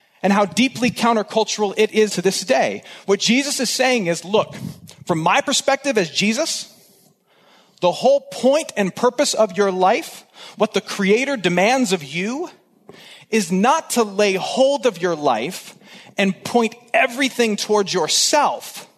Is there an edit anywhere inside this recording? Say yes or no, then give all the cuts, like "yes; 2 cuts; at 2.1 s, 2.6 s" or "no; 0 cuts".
yes; 1 cut; at 2.1 s